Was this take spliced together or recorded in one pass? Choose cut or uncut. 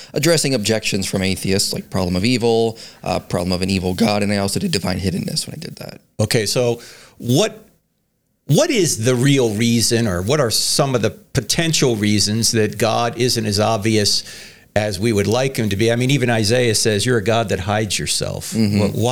uncut